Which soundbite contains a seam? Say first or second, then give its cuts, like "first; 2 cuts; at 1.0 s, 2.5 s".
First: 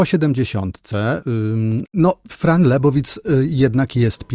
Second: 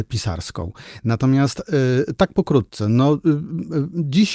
first; 1 cut; at 1.9 s